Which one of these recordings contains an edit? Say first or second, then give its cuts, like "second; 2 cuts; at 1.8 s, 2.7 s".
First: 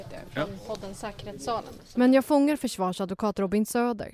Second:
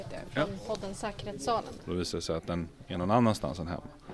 second; 1 cut; at 1.8 s